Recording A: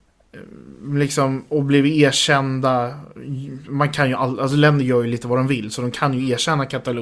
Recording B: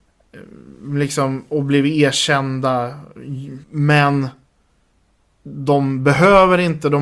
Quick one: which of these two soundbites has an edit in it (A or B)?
B